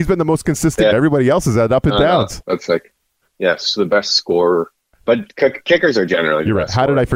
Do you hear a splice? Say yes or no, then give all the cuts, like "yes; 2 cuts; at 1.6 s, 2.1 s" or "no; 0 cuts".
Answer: yes; 2 cuts; at 0.9 s, 2.4 s